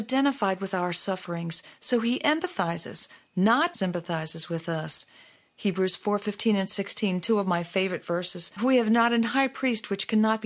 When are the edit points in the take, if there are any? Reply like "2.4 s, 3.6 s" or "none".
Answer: 3.7 s, 8.6 s